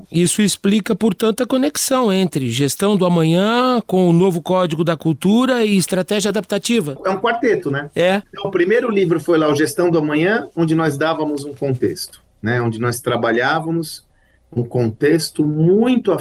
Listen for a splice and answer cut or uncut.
uncut